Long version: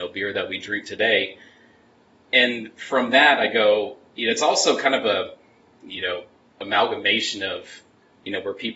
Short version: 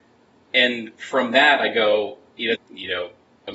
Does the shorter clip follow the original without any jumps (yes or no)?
no